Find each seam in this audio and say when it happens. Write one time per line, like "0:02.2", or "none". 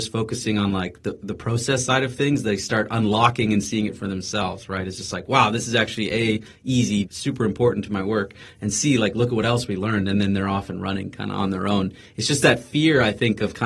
0:07.0